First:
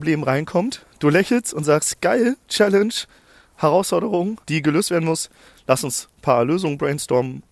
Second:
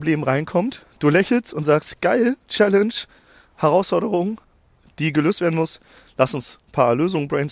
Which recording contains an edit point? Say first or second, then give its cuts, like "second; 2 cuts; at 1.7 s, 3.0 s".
first; 1 cut; at 4.4 s